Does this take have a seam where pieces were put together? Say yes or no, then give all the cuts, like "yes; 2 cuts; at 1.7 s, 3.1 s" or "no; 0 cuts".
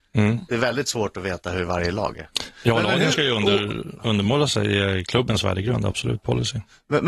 no; 0 cuts